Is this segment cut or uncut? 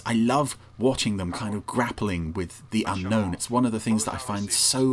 uncut